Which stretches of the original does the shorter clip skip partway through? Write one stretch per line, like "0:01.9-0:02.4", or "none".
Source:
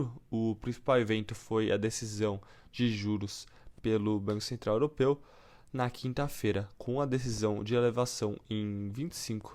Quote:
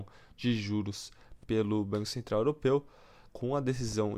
0:05.6-0:06.7